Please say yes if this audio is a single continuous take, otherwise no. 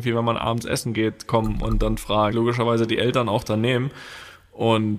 no